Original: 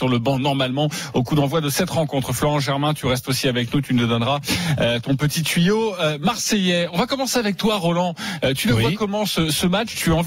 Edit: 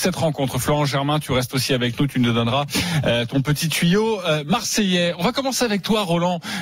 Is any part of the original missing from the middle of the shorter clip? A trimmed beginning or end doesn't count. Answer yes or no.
no